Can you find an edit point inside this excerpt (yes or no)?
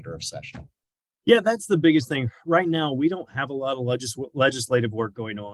no